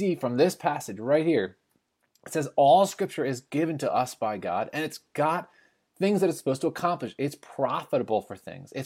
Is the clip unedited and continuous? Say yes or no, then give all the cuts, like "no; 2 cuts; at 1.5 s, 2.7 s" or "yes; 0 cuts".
yes; 0 cuts